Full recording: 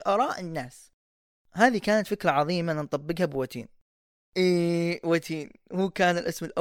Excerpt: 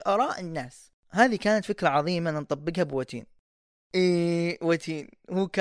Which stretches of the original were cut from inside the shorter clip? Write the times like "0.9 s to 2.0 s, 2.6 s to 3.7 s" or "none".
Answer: 1.0 s to 1.4 s